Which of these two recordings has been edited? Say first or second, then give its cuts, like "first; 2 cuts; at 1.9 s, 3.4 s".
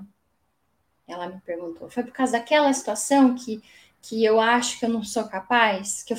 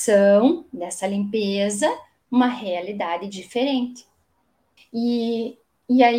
second; 1 cut; at 4.8 s